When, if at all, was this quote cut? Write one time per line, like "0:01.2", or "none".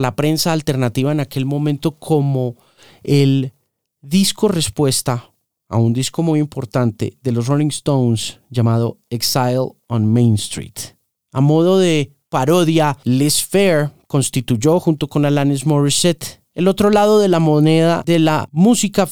none